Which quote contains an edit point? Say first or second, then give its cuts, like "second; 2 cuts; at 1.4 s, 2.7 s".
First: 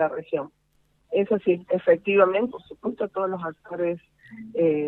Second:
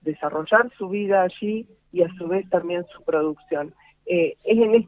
first; 2 cuts; at 1.0 s, 2.5 s